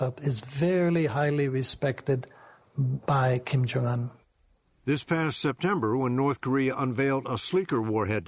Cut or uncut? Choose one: uncut